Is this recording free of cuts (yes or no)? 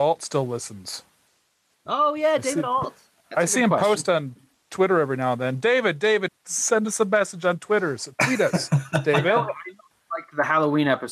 no